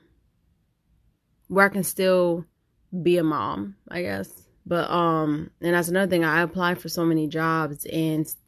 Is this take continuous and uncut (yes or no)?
no